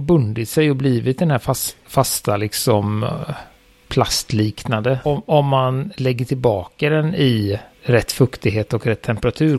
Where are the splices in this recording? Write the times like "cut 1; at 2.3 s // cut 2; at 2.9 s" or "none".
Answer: cut 1; at 5.0 s // cut 2; at 7.7 s